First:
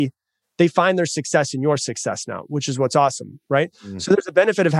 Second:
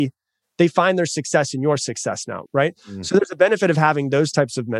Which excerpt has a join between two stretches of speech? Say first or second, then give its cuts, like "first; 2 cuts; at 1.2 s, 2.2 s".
second; 1 cut; at 2.5 s